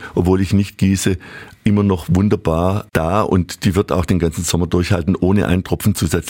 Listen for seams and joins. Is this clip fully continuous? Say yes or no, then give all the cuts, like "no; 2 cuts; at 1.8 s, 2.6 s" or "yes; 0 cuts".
yes; 0 cuts